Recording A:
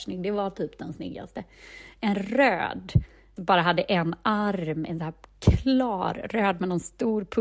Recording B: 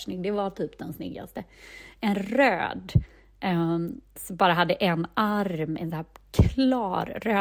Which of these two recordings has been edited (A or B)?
A